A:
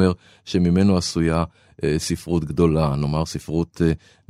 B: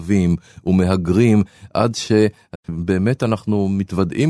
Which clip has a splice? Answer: B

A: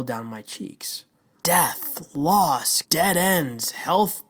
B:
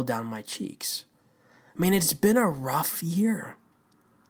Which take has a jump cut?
A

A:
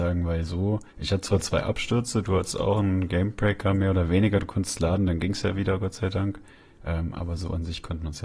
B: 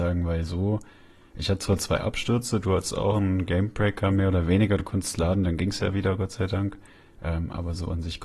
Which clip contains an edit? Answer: A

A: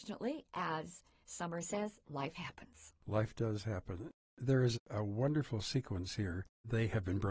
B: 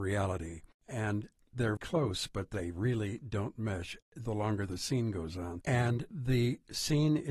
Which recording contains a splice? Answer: B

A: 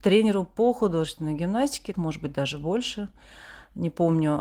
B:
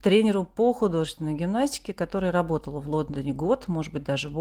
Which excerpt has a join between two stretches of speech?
A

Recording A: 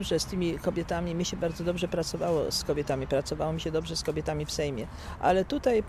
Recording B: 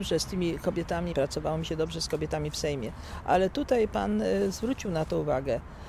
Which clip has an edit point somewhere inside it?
B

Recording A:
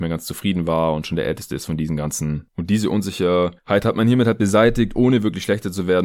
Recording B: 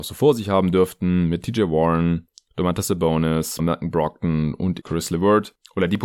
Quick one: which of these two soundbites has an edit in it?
B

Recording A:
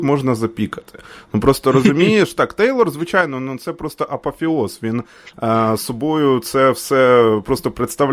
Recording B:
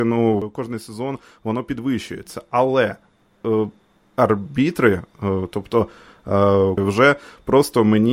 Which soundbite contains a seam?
B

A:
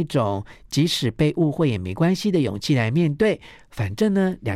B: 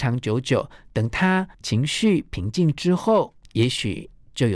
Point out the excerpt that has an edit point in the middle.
B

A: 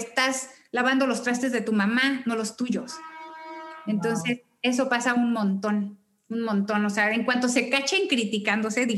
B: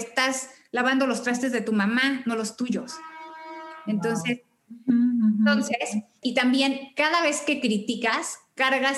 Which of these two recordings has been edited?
B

